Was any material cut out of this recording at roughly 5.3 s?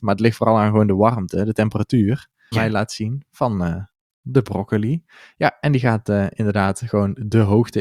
no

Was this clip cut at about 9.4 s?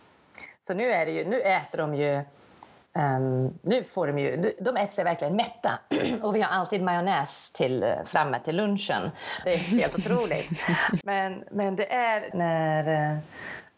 yes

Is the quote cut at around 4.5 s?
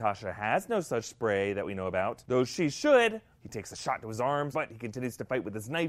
yes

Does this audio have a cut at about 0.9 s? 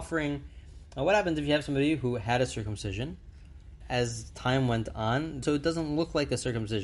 no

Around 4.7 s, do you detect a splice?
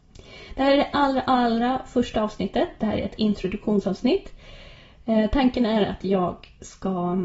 no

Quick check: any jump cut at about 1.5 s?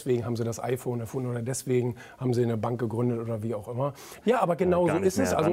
no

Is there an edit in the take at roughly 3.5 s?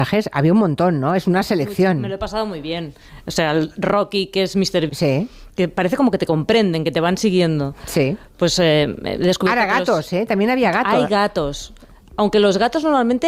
no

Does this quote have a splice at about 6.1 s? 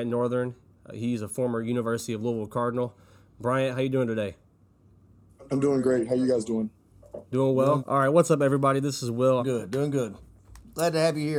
no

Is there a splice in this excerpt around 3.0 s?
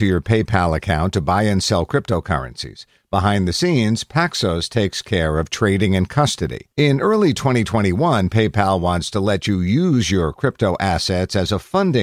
no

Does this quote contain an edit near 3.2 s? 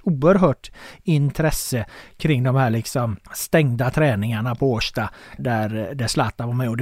yes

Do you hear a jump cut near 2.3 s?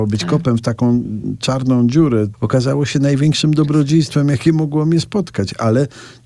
yes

